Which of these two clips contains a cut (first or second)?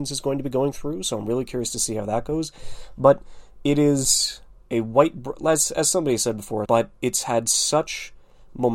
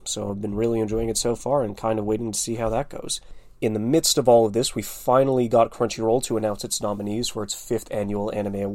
first